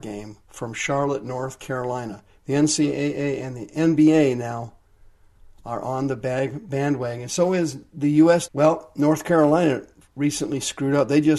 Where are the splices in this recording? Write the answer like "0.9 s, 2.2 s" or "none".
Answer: 8.5 s, 10.1 s